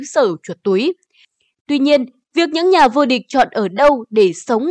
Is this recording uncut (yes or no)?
no